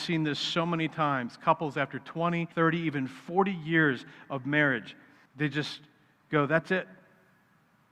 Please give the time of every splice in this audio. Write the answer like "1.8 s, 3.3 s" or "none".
2.5 s, 5.3 s